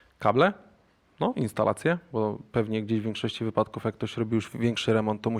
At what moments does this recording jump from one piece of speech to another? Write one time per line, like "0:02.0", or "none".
none